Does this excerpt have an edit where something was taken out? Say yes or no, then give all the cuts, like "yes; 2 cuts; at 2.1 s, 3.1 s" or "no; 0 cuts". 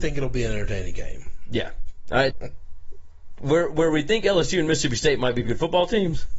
yes; 2 cuts; at 2.3 s, 5.5 s